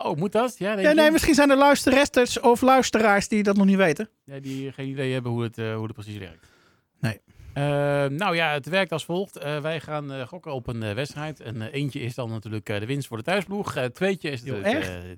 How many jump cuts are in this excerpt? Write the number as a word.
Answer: zero